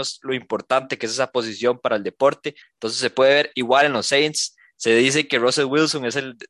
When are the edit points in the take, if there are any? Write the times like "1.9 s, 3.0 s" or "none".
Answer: 2.6 s

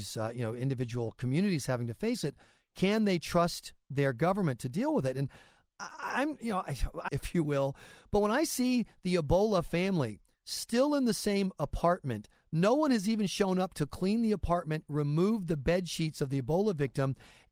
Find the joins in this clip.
7.1 s

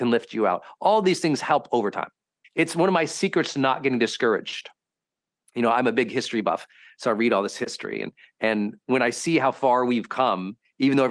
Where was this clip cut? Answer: 2.4 s

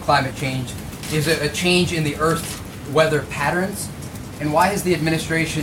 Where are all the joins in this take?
4.4 s

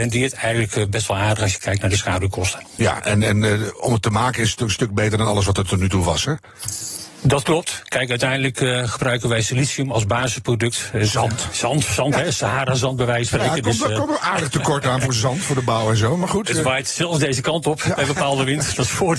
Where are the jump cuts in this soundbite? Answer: none

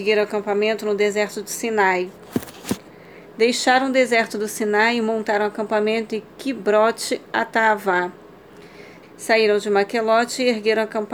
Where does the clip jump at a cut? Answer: 9.0 s

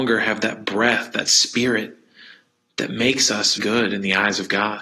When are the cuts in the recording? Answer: 3.6 s

